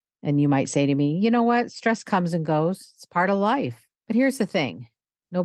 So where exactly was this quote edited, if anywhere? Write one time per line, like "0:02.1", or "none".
0:04.0